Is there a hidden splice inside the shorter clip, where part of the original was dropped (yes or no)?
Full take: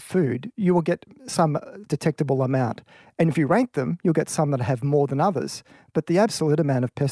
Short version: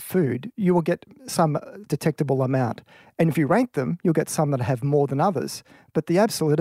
no